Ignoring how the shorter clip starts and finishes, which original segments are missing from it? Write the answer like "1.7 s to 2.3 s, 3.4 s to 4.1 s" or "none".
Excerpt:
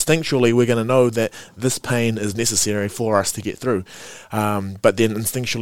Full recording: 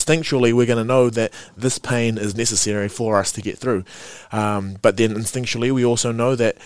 none